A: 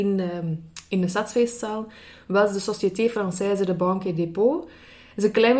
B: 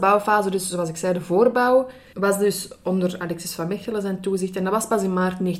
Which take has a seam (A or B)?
B